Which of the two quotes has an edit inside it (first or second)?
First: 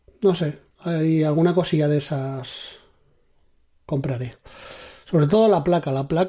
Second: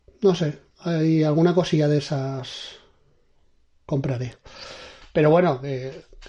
second